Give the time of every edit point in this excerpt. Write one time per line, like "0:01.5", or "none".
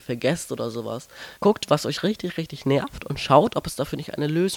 0:01.4